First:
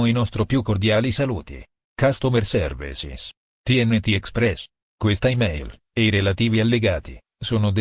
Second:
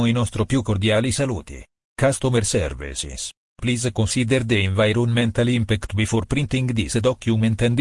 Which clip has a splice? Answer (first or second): second